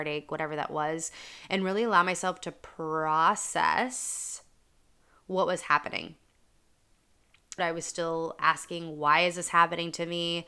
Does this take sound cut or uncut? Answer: cut